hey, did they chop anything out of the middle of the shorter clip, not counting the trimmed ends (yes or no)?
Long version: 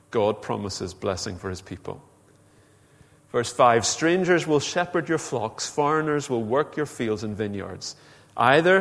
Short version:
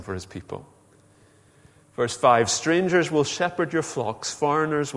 no